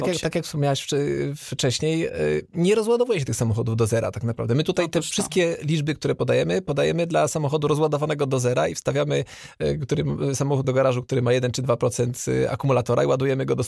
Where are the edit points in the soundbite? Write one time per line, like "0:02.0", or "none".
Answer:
0:10.6